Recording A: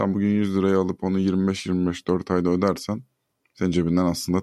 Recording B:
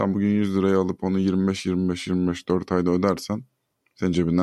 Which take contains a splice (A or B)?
A